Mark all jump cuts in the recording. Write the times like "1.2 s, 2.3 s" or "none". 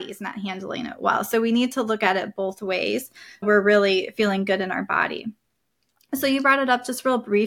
3.4 s